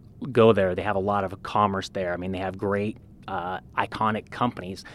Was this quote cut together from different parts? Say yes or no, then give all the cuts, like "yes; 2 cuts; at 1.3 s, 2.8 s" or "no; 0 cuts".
no; 0 cuts